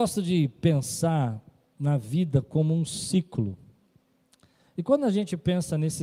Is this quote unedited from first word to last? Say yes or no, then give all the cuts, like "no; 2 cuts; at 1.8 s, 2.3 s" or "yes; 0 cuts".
yes; 0 cuts